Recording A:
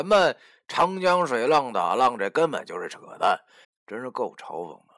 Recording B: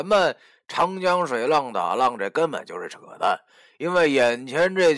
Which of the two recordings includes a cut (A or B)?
A